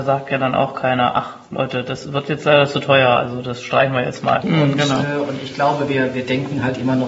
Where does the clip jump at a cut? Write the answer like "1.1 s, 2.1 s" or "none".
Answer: 4.4 s